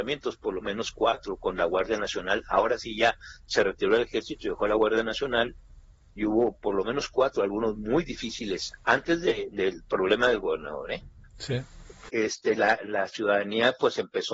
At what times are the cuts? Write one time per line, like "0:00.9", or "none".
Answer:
0:12.1